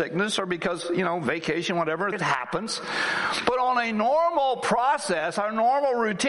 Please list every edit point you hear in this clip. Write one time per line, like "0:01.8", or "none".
0:02.1